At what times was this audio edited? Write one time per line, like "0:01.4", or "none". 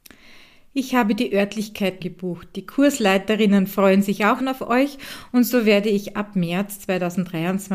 0:02.0
0:04.4